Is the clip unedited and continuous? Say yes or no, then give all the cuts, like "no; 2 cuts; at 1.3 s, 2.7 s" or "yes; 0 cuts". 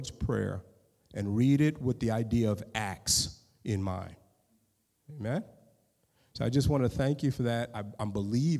yes; 0 cuts